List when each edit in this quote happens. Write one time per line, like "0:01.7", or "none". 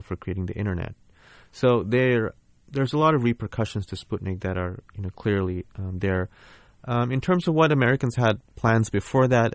none